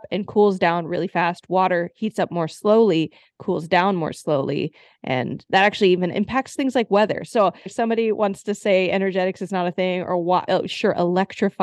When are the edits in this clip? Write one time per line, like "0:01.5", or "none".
0:07.7
0:10.5